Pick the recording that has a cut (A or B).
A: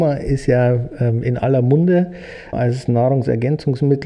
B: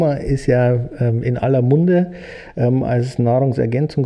A